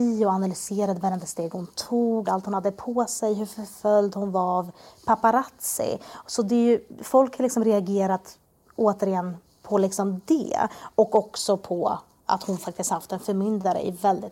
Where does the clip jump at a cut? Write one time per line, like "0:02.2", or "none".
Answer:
0:02.2